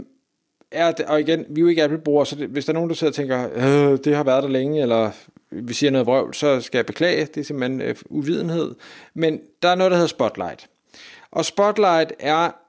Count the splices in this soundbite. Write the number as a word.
zero